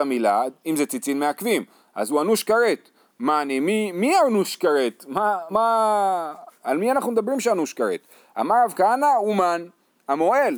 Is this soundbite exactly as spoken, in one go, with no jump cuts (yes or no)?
no